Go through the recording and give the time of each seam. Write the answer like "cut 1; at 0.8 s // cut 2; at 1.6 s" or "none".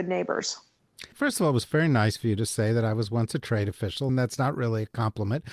cut 1; at 1.1 s // cut 2; at 4.1 s